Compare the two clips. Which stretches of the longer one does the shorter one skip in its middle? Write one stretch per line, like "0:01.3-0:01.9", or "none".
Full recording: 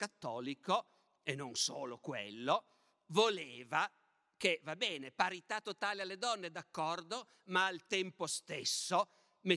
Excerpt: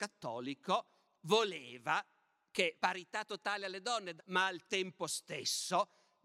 0:01.2-0:03.0
0:04.6-0:05.1
0:06.5-0:07.4

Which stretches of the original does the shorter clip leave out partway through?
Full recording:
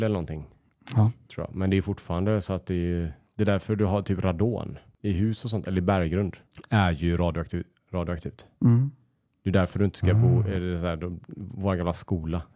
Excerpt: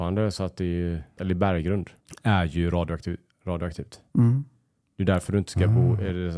0:03.3-0:05.6

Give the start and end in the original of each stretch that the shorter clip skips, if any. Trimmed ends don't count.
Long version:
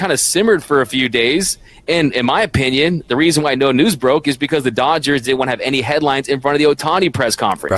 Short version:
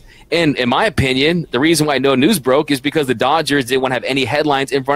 none

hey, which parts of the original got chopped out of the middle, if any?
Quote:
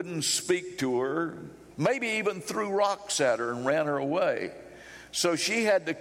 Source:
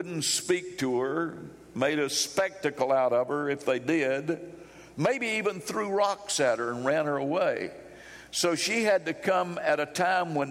0:01.7-0:04.9

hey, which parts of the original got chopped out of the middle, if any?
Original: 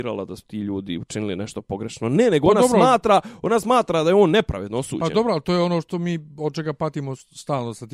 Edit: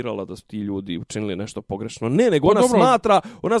none

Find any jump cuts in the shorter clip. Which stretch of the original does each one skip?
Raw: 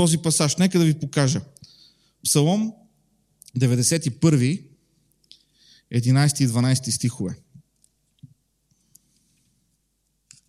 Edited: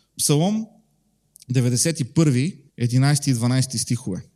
0:04.7-0:05.8

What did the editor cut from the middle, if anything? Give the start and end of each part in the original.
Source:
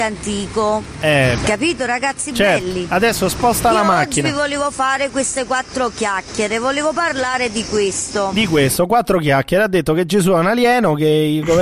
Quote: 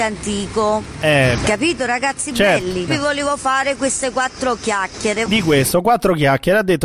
0:02.9-0:04.2
0:06.6-0:08.3

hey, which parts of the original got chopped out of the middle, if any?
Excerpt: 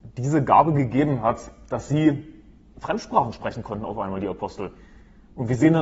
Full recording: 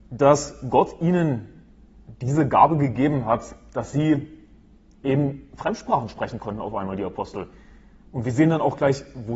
0:04.8-0:05.5

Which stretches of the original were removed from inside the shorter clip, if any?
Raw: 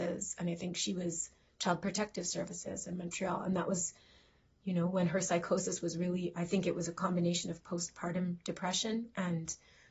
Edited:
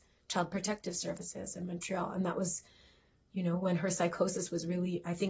none

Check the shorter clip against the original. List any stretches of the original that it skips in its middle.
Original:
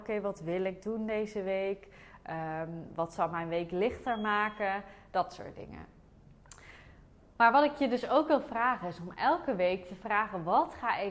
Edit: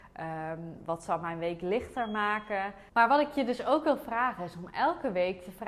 0:05.0-0:07.3

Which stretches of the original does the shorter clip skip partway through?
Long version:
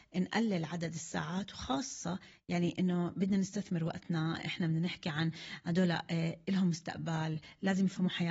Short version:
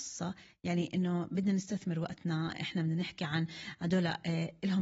none

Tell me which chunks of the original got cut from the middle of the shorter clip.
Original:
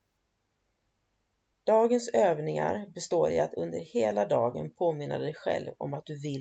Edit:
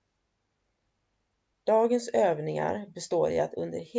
none

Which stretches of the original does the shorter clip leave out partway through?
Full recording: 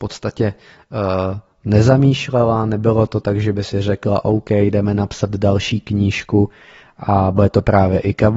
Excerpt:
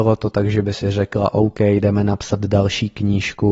none

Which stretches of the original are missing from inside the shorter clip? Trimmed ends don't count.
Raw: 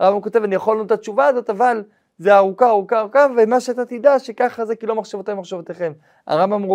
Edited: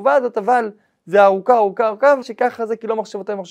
0:03.3-0:04.2

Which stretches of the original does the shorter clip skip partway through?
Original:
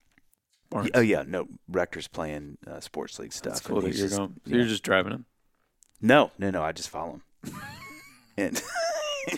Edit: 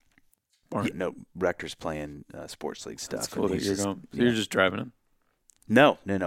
0:00.9-0:01.2

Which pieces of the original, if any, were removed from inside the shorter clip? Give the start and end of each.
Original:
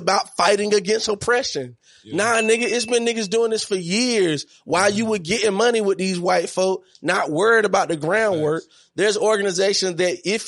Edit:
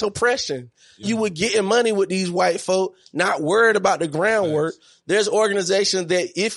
0:02.1-0:04.9

